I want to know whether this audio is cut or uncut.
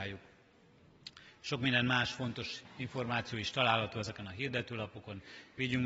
uncut